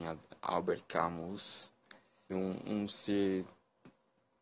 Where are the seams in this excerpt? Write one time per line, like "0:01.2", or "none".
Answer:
0:02.3